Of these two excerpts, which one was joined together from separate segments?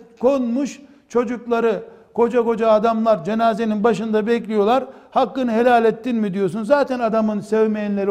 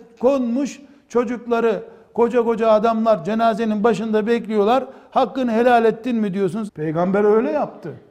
second; 1 cut; at 6.7 s

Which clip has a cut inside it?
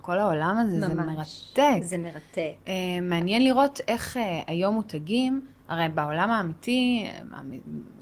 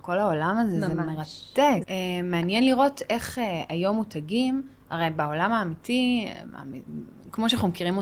second; 1 cut; at 1.8 s

